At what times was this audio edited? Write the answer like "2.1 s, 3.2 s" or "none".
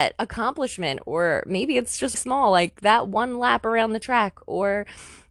2.1 s